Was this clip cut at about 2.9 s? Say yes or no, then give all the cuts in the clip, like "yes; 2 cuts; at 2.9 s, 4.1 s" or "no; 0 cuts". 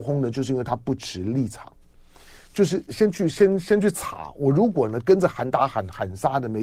yes; 1 cut; at 2.9 s